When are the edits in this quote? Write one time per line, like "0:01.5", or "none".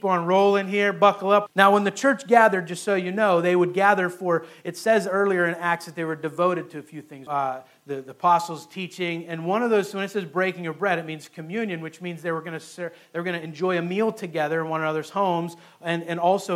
0:01.5
0:07.3